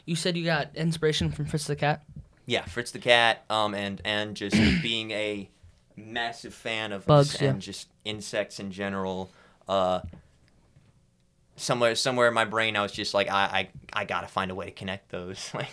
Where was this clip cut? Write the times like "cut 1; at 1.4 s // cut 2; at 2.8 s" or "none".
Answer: cut 1; at 7.1 s